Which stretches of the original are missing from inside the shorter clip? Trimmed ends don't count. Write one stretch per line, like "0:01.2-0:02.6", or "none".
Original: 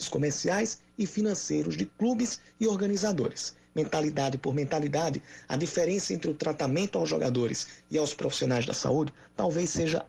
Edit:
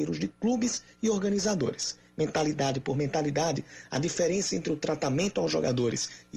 none